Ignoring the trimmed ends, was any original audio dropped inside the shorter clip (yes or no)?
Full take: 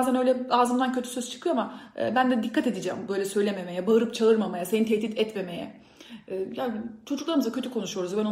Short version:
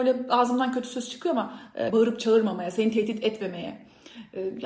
yes